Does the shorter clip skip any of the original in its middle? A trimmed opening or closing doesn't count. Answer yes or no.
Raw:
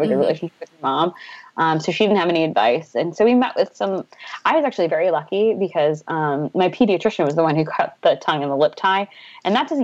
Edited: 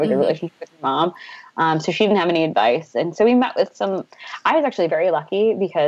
no